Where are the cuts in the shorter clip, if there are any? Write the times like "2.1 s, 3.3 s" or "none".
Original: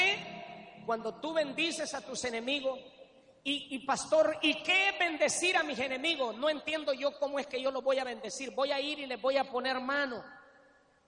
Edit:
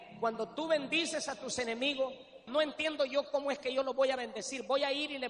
2.5 s